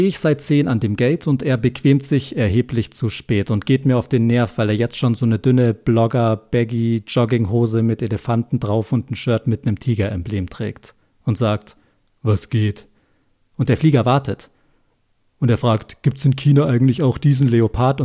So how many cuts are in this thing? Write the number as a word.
zero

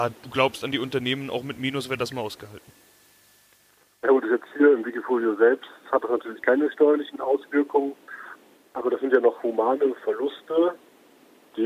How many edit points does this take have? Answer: zero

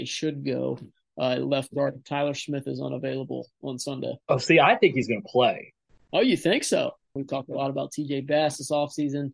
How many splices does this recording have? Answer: two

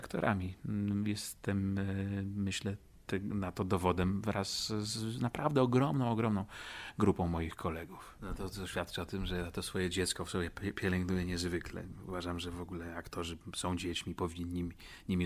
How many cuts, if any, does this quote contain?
one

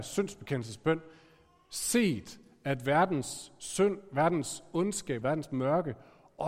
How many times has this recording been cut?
one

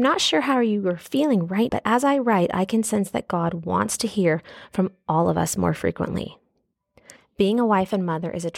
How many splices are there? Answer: two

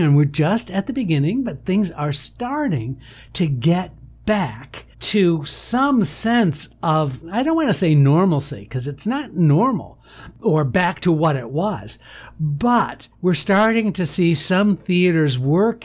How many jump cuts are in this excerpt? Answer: two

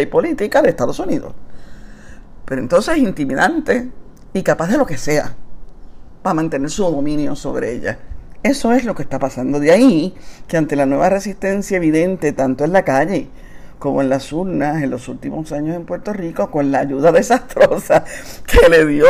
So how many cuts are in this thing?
one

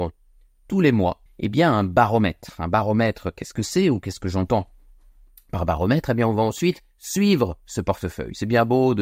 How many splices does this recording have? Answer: one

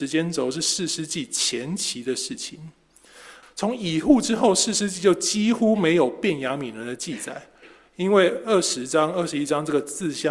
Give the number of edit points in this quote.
one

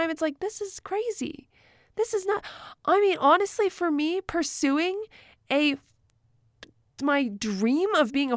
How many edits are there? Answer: zero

